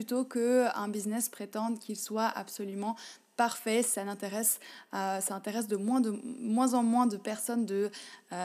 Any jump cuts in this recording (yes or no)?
no